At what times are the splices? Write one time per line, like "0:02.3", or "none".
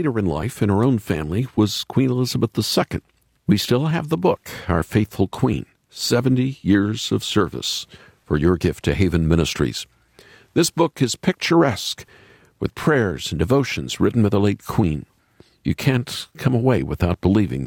none